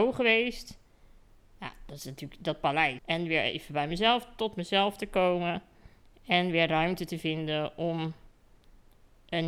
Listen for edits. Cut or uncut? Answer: cut